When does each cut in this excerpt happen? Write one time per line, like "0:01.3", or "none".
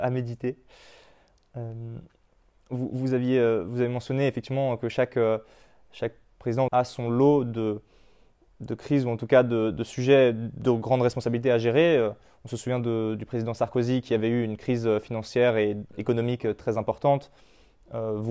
0:06.7